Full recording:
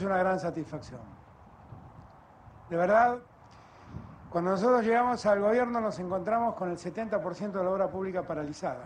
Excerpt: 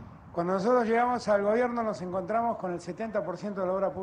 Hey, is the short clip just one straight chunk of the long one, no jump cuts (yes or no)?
yes